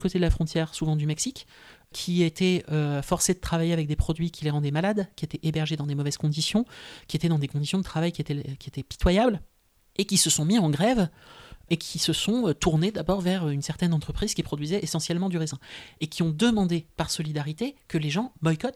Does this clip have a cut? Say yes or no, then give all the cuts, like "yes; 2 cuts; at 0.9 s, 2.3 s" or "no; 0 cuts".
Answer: no; 0 cuts